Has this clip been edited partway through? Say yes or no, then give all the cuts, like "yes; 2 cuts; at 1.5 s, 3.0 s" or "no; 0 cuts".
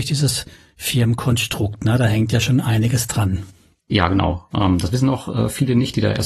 no; 0 cuts